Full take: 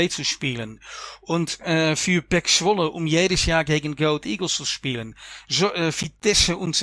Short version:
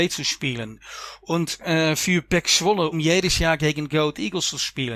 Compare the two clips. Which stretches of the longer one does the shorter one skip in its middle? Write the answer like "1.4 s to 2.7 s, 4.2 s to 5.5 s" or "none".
2.9 s to 3.0 s